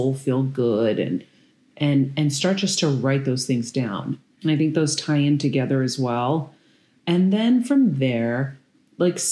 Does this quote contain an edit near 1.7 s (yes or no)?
no